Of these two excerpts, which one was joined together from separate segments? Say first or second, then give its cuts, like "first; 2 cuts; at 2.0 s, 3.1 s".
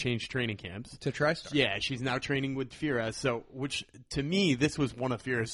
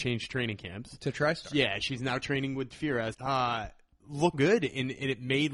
second; 2 cuts; at 3.1 s, 4.3 s